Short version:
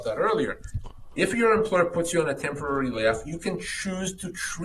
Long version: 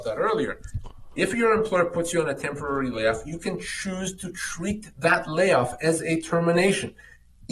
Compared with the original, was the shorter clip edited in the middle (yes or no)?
no